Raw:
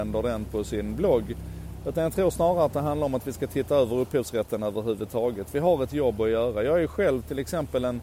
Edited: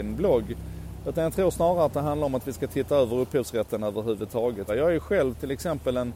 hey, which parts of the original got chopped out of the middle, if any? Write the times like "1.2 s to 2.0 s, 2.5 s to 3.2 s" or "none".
5.5 s to 6.6 s